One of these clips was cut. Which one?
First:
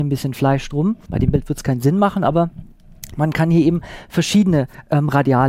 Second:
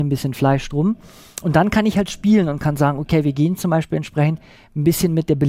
first; 1 cut; at 1.1 s

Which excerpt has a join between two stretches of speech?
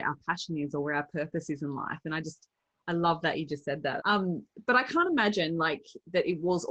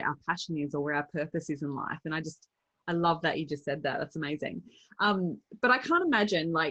first; 1 cut; at 4.0 s

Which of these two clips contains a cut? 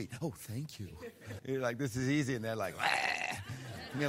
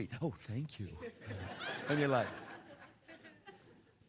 first; 1 cut; at 1.4 s

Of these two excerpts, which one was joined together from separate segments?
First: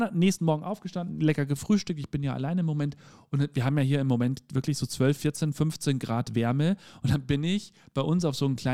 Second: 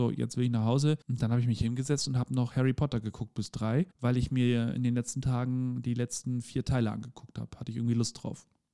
second; 2 cuts; at 1.0 s, 3.9 s

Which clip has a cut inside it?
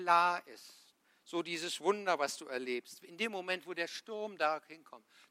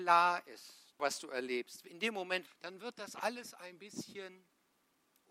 second; 2 cuts; at 1.0 s, 2.5 s

